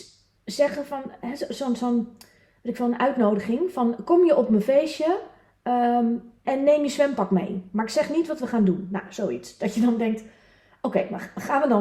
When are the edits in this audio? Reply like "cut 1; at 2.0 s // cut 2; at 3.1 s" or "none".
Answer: cut 1; at 6.4 s